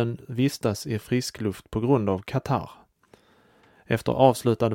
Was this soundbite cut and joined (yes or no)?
no